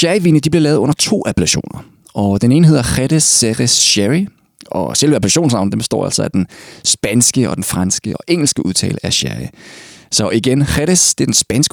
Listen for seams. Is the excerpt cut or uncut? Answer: uncut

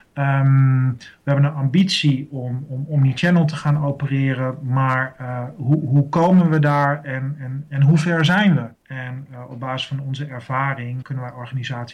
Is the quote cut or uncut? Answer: cut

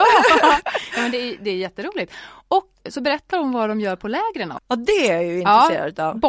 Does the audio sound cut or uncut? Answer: cut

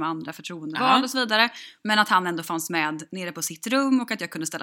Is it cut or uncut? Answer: uncut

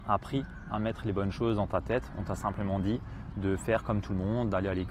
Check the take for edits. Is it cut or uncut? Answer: uncut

